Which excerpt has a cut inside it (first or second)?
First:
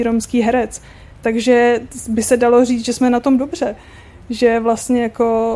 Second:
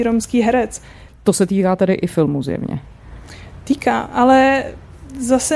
second